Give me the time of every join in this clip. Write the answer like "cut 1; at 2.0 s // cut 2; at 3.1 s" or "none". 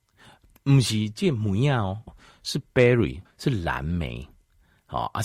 cut 1; at 2.1 s // cut 2; at 3.3 s